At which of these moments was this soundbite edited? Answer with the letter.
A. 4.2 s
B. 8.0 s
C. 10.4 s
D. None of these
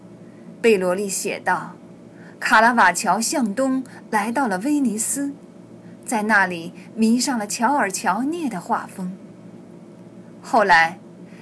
D